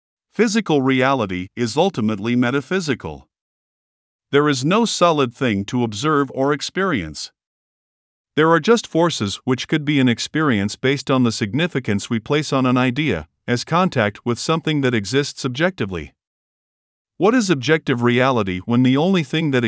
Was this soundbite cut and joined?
no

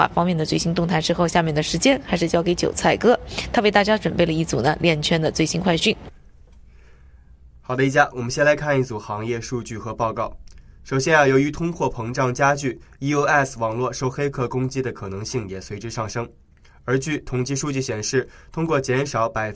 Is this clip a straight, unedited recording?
yes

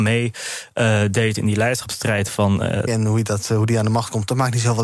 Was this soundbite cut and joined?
yes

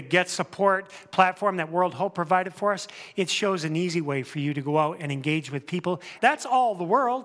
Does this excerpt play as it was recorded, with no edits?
no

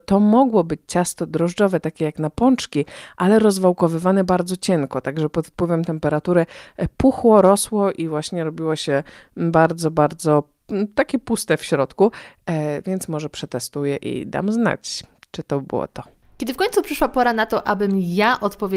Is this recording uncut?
yes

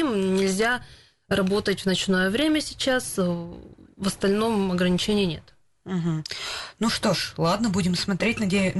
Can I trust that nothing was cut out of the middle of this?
yes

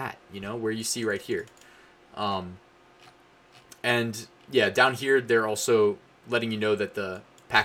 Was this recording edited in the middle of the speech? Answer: no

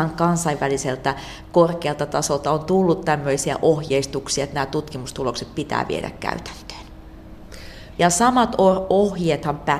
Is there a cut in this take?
yes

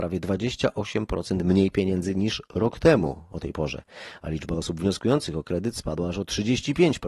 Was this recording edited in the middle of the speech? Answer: no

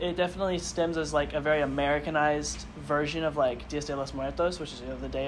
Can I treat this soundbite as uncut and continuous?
yes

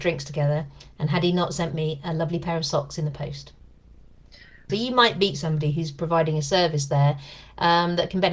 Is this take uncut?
no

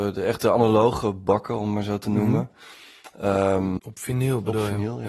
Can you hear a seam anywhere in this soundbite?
yes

